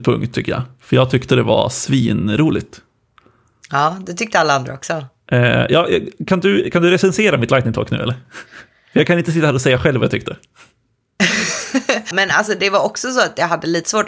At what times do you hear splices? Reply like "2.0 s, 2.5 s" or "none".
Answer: 12.1 s